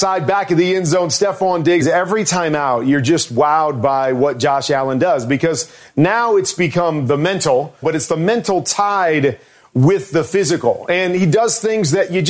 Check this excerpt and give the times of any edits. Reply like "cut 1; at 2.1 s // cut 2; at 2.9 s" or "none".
cut 1; at 1.8 s // cut 2; at 7.8 s